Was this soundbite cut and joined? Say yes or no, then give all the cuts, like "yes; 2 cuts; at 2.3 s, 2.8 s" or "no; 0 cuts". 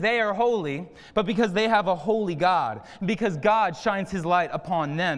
no; 0 cuts